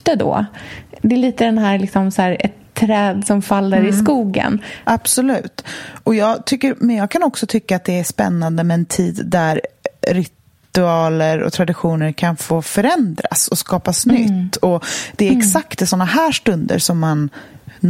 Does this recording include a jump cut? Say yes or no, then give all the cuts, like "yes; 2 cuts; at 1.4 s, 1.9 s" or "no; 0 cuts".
yes; 1 cut; at 4.8 s